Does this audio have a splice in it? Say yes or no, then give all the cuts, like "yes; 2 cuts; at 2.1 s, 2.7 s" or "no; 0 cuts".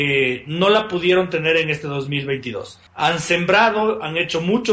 yes; 1 cut; at 2.9 s